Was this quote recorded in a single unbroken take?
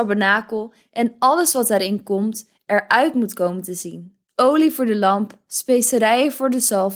no; 1 cut; at 4.3 s

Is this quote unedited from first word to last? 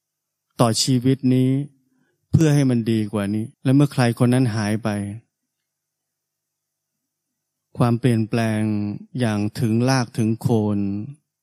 no; 1 cut; at 3.5 s

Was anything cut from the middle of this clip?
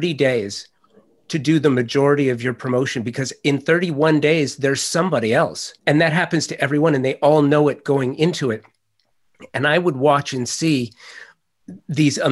yes; 1 cut; at 5.8 s

